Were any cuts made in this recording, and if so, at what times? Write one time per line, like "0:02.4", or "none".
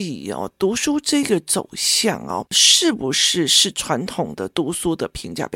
none